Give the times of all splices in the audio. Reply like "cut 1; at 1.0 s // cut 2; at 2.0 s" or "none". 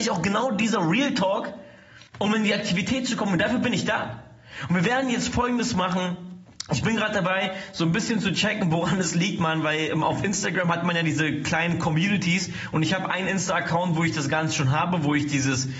cut 1; at 2.1 s